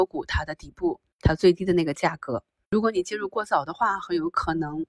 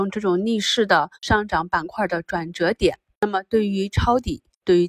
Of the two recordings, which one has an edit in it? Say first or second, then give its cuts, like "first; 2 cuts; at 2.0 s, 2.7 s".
second; 1 cut; at 1.1 s